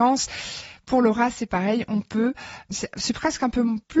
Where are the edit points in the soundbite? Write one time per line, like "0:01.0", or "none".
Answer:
none